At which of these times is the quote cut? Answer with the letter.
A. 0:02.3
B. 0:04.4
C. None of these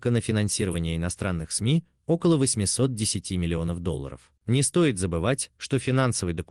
B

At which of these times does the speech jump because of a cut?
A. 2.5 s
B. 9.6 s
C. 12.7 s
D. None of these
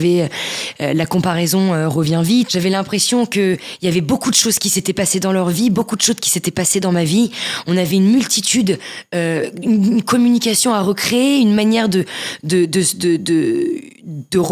A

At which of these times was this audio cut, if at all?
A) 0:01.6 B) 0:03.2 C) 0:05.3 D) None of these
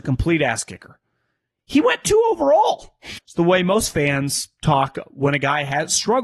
B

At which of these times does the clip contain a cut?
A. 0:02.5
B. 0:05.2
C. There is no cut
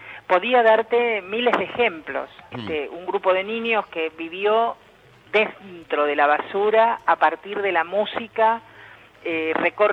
A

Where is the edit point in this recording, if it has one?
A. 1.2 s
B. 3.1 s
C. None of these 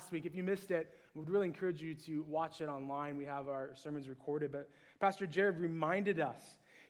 C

